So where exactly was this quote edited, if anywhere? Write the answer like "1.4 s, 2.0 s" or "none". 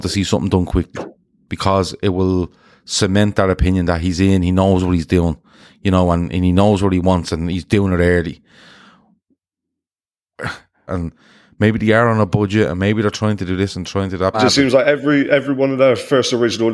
10.9 s, 14.3 s

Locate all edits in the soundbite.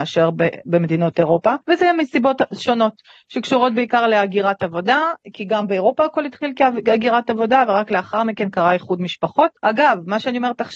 1.6 s, 9.6 s

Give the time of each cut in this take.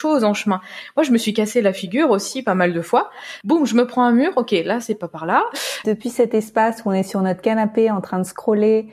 3.4 s, 5.8 s

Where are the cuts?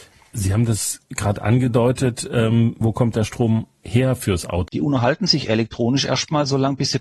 2.8 s, 4.7 s

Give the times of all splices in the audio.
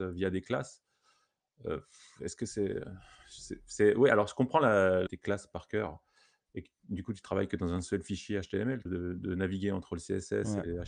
5.1 s, 8.9 s

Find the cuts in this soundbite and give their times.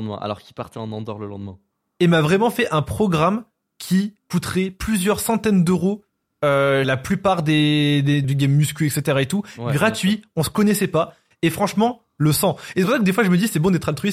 6.8 s, 8.2 s

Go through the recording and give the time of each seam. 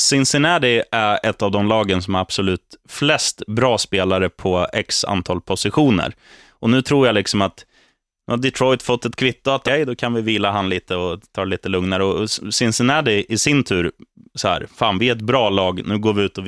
9.7 s

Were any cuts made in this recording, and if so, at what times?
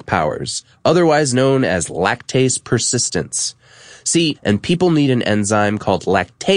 4.3 s

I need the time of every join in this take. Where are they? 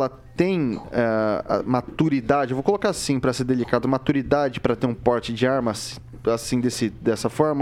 none

